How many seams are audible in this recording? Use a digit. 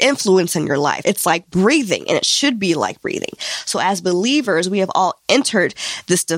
1